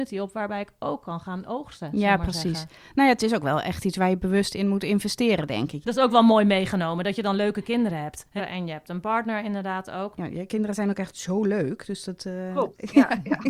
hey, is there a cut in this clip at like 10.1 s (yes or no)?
yes